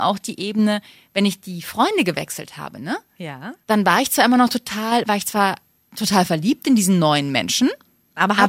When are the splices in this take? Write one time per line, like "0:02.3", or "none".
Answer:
0:03.6